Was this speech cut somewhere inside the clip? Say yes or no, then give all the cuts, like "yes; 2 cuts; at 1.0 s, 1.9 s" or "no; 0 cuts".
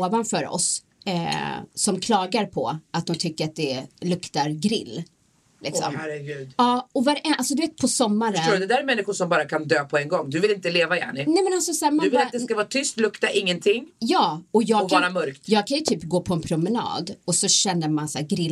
no; 0 cuts